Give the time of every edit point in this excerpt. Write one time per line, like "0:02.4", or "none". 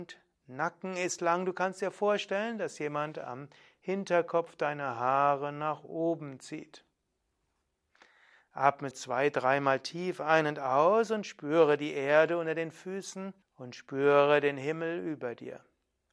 0:08.9
0:13.4